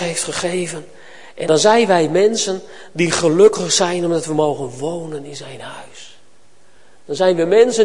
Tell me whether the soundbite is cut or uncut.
cut